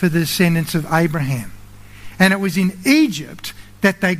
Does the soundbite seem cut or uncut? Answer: uncut